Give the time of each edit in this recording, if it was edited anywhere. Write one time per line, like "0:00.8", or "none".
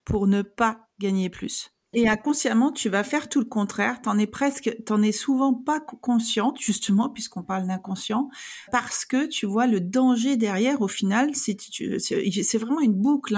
0:01.9
0:08.7